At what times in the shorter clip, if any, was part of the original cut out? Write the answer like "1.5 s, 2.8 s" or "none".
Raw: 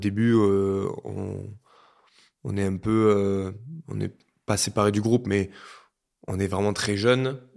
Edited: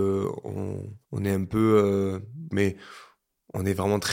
1.0 s, 2.5 s